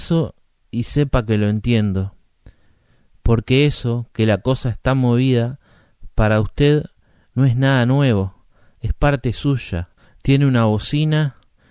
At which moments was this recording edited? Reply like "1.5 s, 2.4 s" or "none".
none